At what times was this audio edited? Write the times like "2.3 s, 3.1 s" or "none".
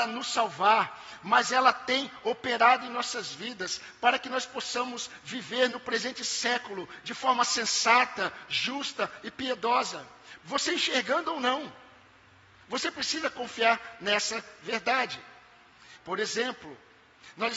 10.4 s, 16.0 s